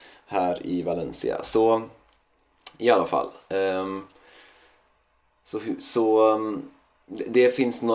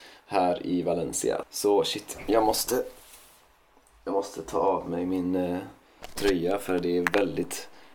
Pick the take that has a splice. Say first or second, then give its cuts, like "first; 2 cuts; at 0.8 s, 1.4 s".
second; 1 cut; at 1.4 s